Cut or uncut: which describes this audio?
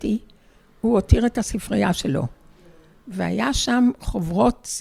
uncut